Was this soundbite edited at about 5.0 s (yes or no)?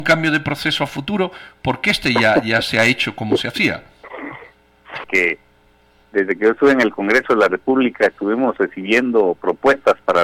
yes